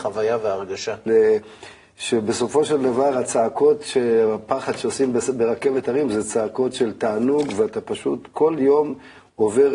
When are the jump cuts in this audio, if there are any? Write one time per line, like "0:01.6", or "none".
0:01.1